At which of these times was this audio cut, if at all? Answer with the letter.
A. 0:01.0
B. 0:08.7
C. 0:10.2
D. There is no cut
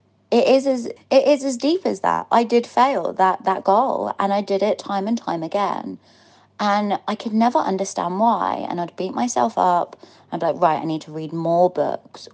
A